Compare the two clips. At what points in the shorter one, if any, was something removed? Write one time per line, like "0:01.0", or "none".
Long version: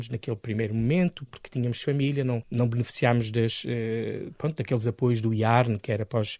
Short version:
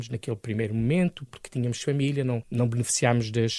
none